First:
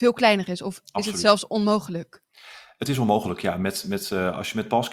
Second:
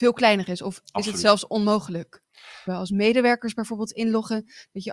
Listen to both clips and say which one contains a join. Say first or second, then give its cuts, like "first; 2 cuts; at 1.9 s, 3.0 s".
second; 1 cut; at 2.7 s